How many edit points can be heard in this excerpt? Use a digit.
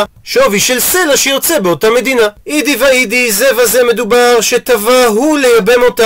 1